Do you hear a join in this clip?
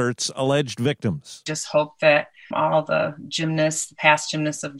yes; 1 cut; at 2.5 s

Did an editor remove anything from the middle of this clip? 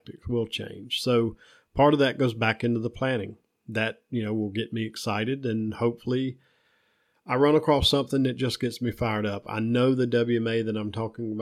no; 0 cuts

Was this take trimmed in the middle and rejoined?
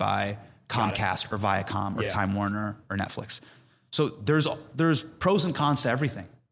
no; 0 cuts

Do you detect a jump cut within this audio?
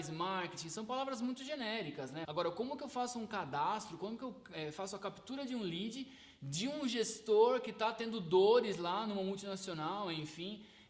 yes; 1 cut; at 2.2 s

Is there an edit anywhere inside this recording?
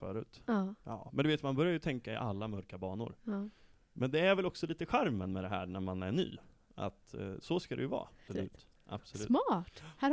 yes; 1 cut; at 8.3 s

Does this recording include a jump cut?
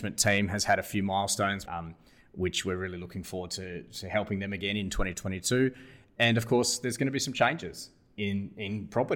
yes; 1 cut; at 1.7 s

